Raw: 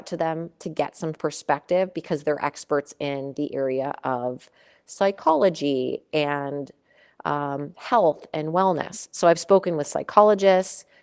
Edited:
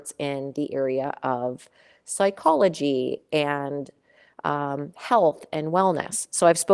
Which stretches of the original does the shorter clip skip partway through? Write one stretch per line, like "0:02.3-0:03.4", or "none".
none